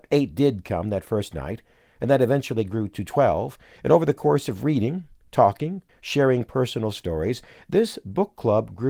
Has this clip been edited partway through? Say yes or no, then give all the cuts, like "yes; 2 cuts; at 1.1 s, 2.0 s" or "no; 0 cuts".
yes; 1 cut; at 5.9 s